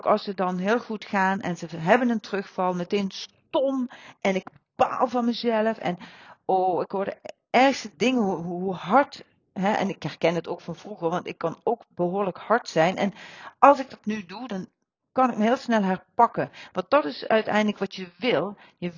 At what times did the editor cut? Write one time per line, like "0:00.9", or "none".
none